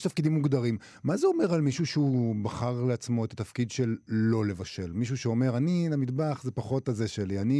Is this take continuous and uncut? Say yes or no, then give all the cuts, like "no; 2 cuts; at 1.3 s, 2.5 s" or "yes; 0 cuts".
yes; 0 cuts